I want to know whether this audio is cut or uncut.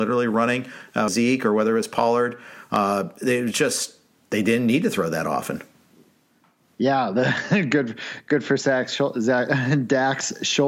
cut